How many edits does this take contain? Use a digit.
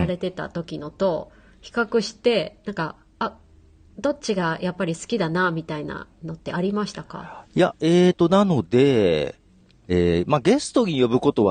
0